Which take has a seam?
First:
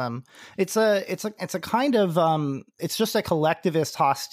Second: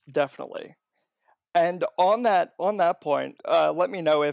second; 1 cut; at 3.4 s

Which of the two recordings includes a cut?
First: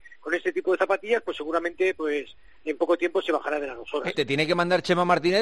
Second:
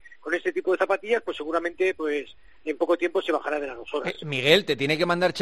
first; 1 cut; at 4.1 s

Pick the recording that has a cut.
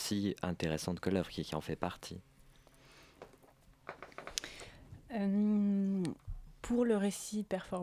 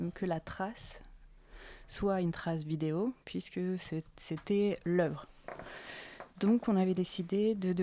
second; 1 cut; at 6.3 s

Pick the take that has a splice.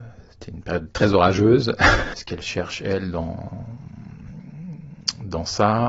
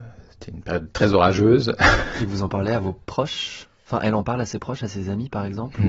first; 1 cut; at 2.1 s

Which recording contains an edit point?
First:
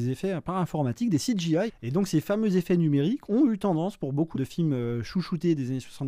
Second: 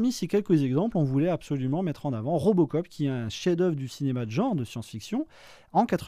first; 2 cuts; at 1.7 s, 4.3 s

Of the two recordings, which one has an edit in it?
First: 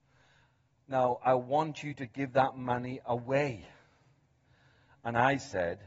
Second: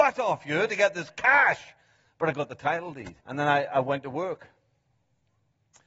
second; 2 cuts; at 2.0 s, 3.2 s

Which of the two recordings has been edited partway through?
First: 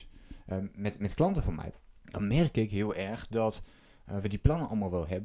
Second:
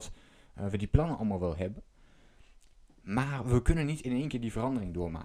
first; 1 cut; at 2.0 s

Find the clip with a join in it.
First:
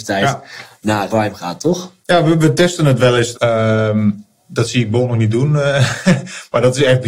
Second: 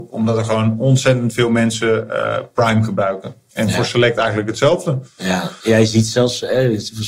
first; 2 cuts; at 1.1 s, 3.3 s

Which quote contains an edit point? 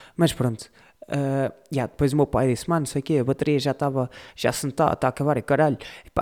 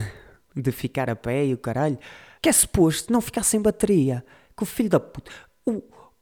second; 1 cut; at 2.4 s

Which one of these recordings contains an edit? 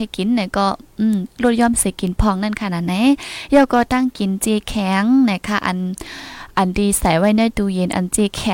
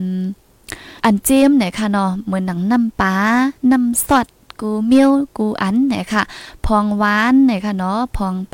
second; 1 cut; at 1.0 s

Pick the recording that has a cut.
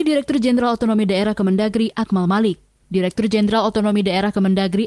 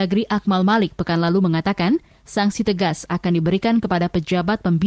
first; 1 cut; at 2.8 s

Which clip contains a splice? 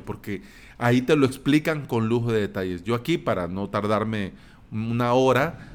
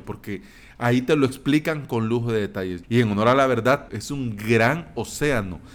second; 2 cuts; at 2.8 s, 3.9 s

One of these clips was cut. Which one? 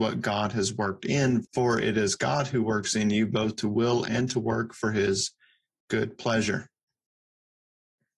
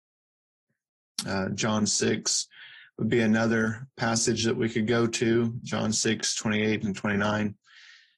first; 1 cut; at 1.4 s

